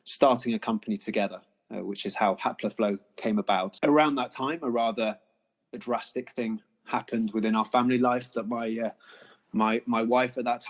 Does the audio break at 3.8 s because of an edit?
yes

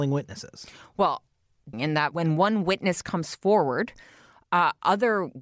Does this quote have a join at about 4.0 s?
no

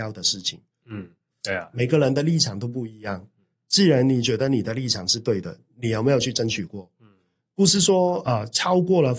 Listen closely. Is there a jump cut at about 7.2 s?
no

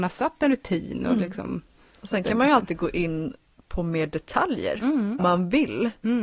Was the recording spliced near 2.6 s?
no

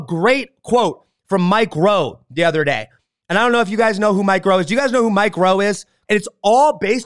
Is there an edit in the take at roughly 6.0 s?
yes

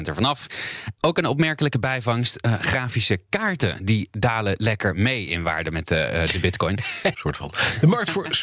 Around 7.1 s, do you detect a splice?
yes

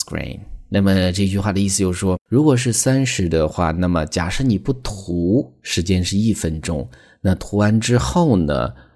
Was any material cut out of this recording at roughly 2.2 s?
yes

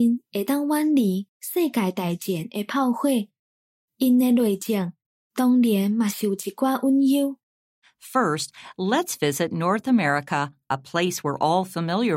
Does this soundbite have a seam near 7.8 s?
yes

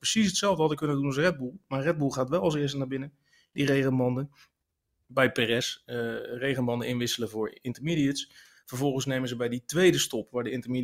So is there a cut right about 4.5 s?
no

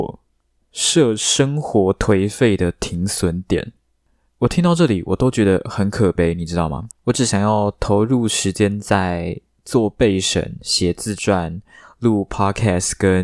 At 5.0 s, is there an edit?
no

